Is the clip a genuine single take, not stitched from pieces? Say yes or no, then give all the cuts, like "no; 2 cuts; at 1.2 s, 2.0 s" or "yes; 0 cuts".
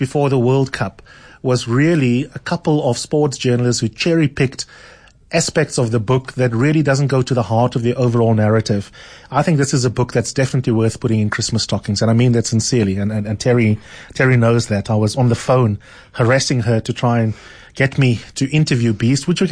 yes; 0 cuts